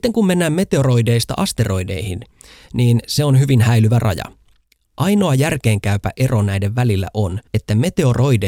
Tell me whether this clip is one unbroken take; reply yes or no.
no